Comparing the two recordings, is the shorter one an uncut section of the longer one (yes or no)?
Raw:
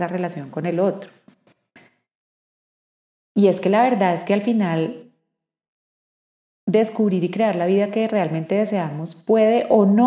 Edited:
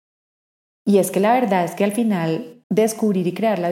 no